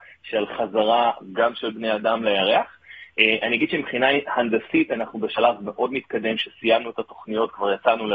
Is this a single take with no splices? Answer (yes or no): yes